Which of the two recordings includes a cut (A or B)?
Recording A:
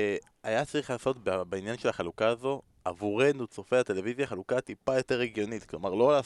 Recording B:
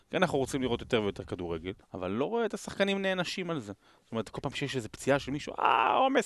B